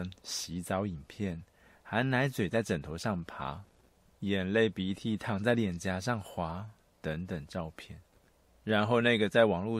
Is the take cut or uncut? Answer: cut